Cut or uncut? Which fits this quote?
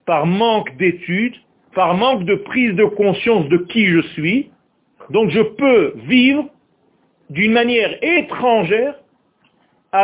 uncut